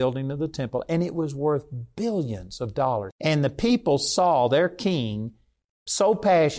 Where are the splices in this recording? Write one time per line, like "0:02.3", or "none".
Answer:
0:03.1